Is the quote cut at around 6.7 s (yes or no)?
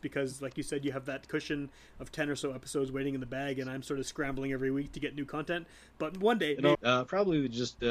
yes